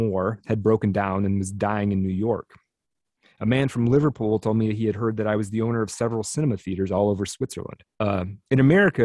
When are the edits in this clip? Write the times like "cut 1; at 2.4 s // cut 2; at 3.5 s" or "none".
cut 1; at 7.9 s